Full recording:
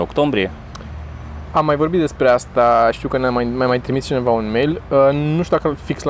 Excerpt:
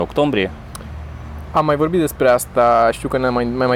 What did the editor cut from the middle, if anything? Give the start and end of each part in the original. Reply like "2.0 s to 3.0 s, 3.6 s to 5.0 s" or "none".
none